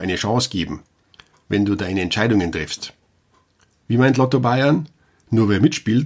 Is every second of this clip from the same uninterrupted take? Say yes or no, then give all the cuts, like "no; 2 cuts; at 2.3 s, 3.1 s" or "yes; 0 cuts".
yes; 0 cuts